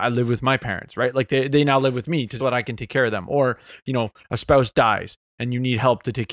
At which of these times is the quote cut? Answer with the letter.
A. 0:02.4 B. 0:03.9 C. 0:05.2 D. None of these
A